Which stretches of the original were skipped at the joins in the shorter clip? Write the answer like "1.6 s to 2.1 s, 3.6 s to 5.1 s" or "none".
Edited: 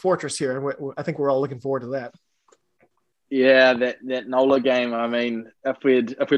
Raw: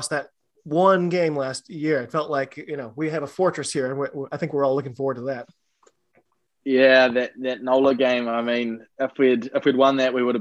none